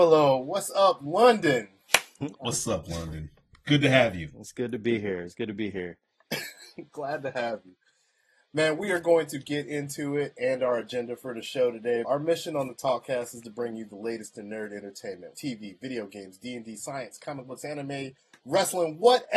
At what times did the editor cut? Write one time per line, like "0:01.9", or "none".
0:02.4
0:12.0
0:15.3